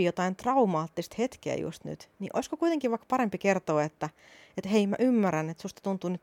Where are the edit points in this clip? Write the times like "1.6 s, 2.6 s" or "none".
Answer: none